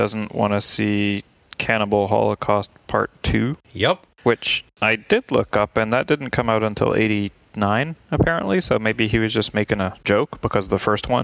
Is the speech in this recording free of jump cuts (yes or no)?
yes